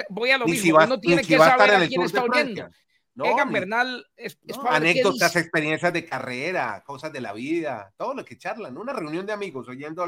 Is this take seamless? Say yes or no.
yes